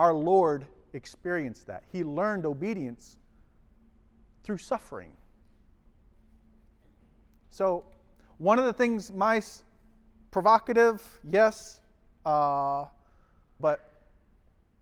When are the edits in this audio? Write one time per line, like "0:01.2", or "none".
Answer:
0:13.6